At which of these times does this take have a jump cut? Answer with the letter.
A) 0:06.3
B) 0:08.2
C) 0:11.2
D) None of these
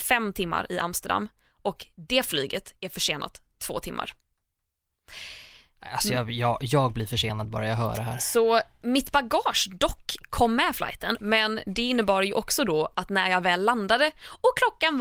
C